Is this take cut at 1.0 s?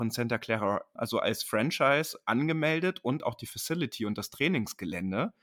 yes; 1 cut; at 1.0 s

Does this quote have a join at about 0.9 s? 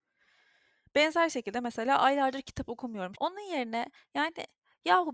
no; 1 cut; at 3.1 s

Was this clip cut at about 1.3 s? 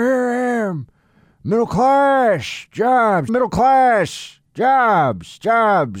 no; 1 cut; at 3.3 s

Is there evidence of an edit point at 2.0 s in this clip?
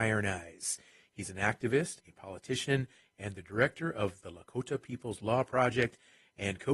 yes; 1 cut; at 2.0 s

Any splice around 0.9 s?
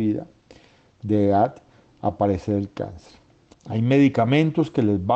no; 1 cut; at 3.5 s

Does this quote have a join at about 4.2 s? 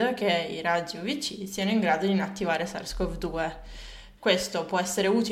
yes; 1 cut; at 4.2 s

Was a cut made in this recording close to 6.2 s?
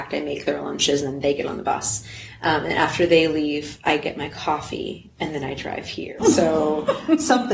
yes; 1 cut; at 6.2 s

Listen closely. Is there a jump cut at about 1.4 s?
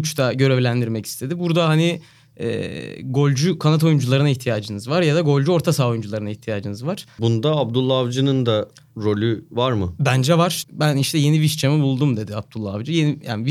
no; 2 cuts; at 7.2 s, 10.6 s

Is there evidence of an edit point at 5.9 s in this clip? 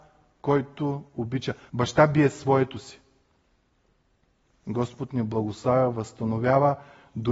no; 2 cuts; at 1.7 s, 4.5 s

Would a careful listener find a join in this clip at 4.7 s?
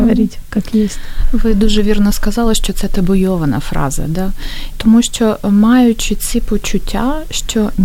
yes; 1 cut; at 4.7 s

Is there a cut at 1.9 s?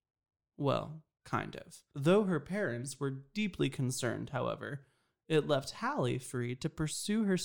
yes; 1 cut; at 1.9 s

